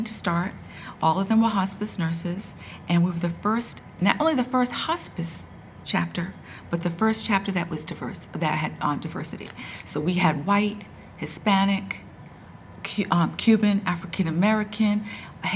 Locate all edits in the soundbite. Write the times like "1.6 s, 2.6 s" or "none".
none